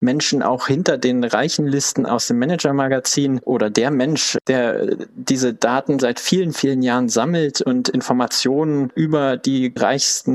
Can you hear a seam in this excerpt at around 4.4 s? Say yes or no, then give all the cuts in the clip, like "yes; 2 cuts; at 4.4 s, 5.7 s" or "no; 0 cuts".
no; 1 cut; at 6.0 s